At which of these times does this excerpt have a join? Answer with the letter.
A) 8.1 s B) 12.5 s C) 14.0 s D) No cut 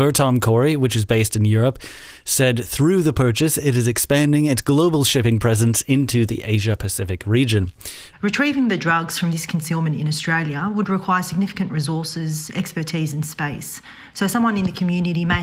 A